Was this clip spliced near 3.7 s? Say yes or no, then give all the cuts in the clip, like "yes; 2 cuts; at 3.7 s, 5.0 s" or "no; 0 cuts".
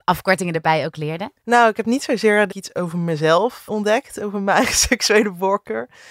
yes; 3 cuts; at 1.4 s, 2.5 s, 3.7 s